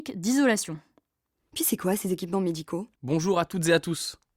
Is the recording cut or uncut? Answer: cut